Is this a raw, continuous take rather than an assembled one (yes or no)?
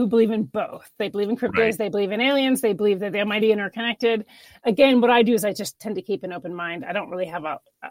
no